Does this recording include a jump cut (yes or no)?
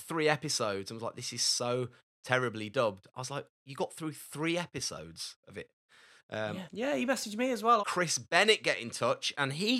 yes